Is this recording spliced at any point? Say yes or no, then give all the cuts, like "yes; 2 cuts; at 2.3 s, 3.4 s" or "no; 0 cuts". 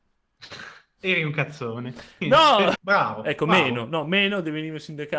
yes; 1 cut; at 2.8 s